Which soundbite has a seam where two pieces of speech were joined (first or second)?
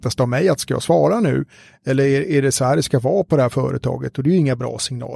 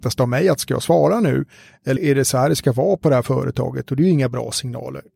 second